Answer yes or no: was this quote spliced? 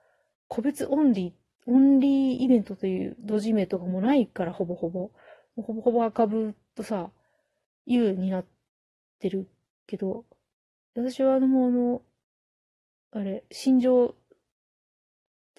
no